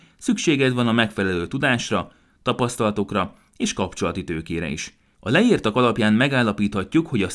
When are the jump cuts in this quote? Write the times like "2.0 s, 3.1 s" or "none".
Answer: 5.1 s